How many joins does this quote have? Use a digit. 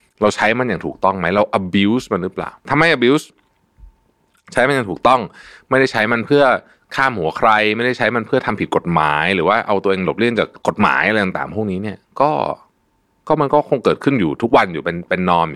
1